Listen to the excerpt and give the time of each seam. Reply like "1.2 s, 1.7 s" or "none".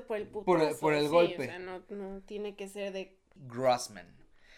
3.4 s